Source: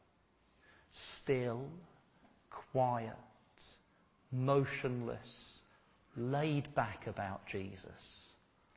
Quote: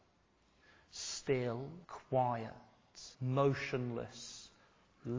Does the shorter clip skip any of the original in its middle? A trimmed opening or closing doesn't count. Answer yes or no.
yes